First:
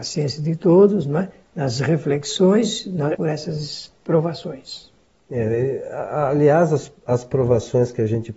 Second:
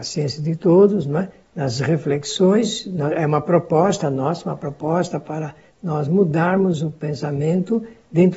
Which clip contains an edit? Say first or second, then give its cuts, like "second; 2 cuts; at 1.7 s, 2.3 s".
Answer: first; 1 cut; at 3.1 s